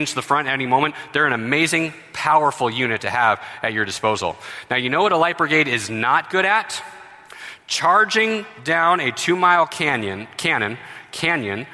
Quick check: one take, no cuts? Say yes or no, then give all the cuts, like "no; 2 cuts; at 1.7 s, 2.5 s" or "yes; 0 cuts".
yes; 0 cuts